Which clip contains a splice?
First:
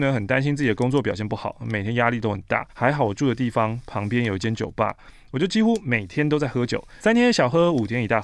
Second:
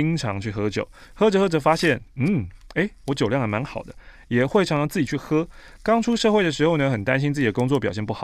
first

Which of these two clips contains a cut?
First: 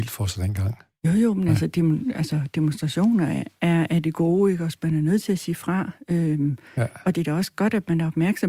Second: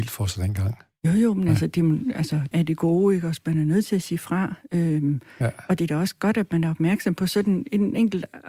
second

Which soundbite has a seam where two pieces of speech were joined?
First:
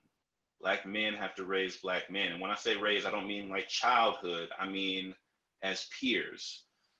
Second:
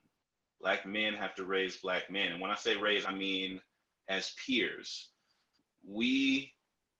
second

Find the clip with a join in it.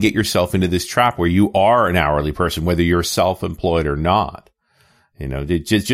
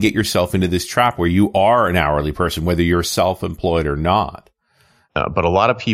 second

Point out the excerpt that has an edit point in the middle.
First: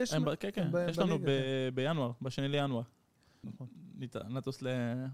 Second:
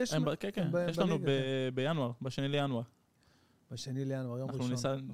first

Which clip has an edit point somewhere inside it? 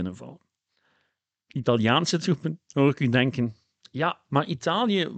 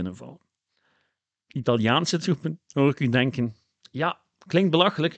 first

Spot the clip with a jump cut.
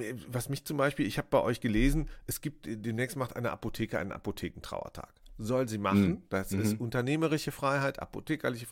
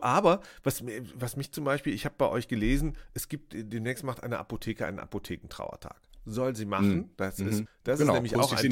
second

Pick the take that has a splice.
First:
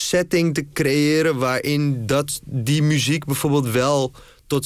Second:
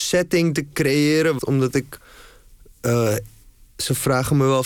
second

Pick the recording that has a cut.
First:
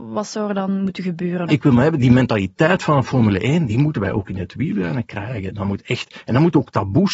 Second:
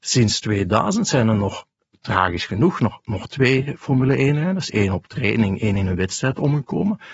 first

